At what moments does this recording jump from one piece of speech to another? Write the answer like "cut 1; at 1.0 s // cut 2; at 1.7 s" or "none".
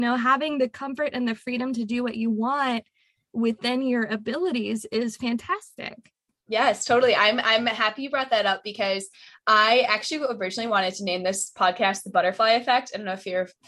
none